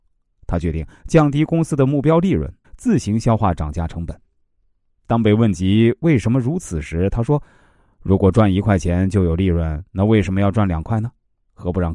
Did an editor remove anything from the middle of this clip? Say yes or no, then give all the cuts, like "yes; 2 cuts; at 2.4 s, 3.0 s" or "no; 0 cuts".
yes; 1 cut; at 2.6 s